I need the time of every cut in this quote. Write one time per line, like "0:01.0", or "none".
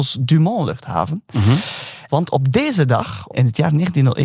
0:02.1

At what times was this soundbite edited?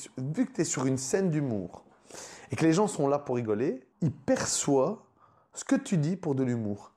0:03.9

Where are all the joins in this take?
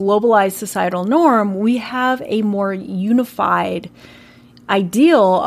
none

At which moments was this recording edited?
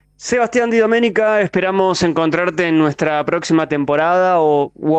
none

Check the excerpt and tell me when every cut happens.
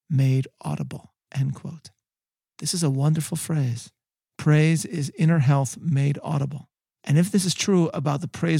none

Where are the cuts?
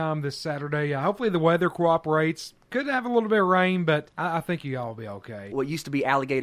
0:04.1
0:05.5

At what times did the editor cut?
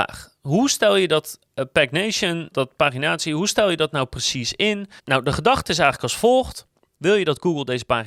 0:02.5
0:05.0
0:06.9

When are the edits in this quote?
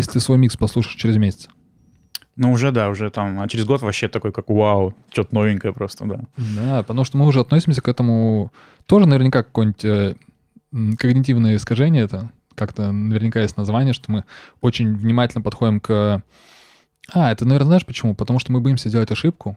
none

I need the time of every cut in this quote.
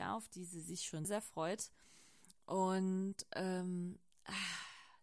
0:01.0

